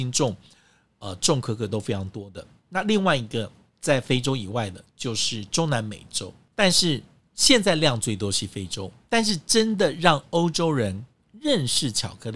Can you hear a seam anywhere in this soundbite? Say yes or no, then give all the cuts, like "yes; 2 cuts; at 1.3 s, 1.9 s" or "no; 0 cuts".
no; 0 cuts